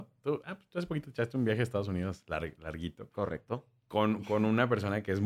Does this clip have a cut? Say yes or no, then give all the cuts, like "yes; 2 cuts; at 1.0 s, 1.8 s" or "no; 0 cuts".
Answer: no; 0 cuts